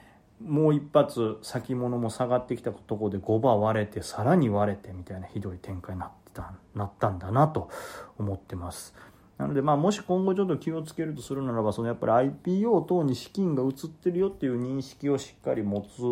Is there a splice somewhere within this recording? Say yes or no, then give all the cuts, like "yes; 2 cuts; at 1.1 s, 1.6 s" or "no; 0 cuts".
no; 0 cuts